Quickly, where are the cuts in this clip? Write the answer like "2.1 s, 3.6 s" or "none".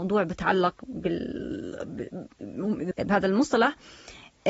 2.9 s